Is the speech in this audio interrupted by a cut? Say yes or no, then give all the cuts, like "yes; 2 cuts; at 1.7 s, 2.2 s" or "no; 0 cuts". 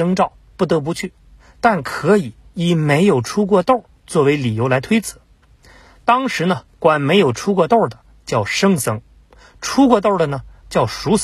no; 0 cuts